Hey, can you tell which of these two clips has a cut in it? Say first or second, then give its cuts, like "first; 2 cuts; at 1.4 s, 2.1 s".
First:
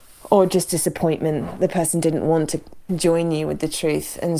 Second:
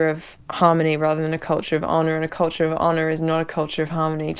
first; 1 cut; at 2.9 s